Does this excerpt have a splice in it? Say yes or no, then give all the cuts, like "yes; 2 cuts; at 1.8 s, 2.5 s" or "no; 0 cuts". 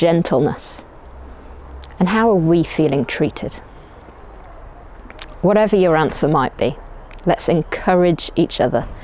no; 0 cuts